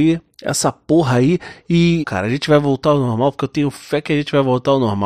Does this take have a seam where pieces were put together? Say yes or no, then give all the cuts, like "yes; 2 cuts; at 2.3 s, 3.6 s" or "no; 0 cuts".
yes; 1 cut; at 2.0 s